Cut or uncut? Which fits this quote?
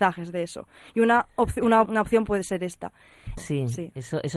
cut